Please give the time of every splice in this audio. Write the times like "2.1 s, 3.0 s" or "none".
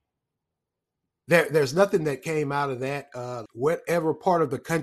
3.5 s